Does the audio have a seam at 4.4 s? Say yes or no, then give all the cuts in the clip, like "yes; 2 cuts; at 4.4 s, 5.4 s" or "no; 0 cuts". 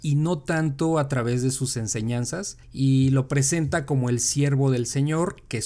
no; 1 cut; at 2.6 s